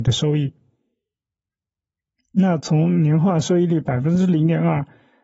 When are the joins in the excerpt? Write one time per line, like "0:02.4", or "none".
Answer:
0:02.2